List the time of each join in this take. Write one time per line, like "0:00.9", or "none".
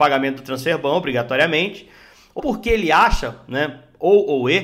0:02.4
0:03.4

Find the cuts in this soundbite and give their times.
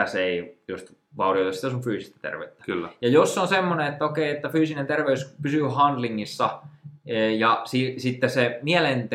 none

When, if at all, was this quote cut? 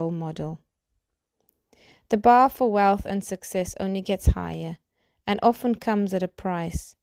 none

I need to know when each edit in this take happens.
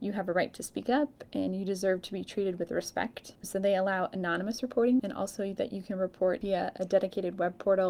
0:03.3
0:05.0

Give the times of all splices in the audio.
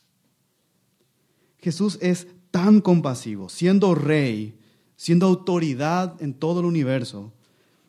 none

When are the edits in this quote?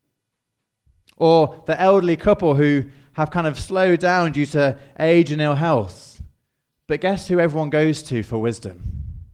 none

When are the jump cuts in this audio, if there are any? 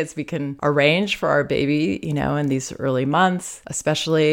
none

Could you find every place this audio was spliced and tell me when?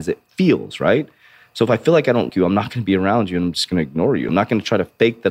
0:02.3
0:04.3

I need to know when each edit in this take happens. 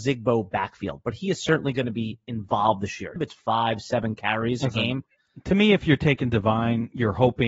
0:03.2

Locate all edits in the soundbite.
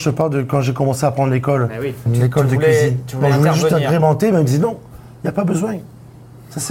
0:02.1

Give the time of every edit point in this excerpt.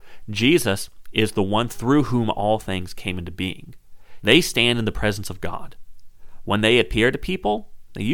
0:04.2

